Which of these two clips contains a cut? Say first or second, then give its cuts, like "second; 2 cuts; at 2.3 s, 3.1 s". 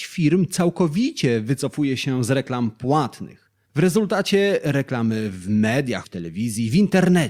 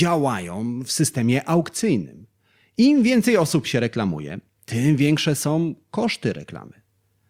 first; 2 cuts; at 3.7 s, 6.0 s